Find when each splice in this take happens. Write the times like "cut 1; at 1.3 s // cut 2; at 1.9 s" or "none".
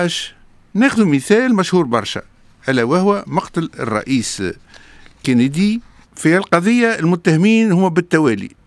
none